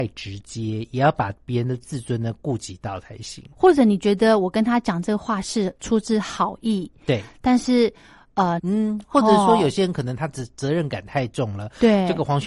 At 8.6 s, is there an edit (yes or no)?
yes